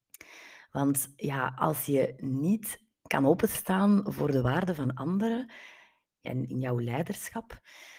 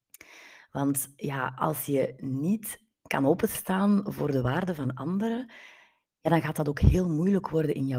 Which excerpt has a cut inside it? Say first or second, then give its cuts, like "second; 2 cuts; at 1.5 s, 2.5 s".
first; 1 cut; at 6.2 s